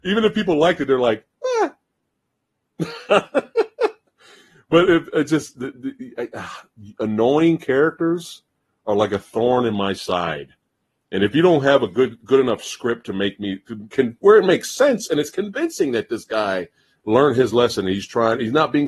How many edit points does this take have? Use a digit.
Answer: 1